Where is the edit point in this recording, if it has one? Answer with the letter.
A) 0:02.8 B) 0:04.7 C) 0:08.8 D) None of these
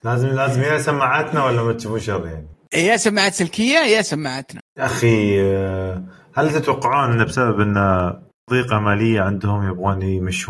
D